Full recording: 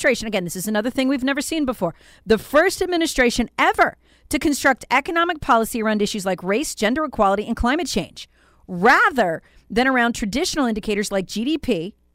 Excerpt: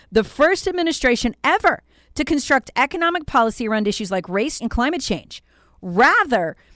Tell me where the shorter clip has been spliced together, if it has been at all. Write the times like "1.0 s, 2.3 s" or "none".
4.6 s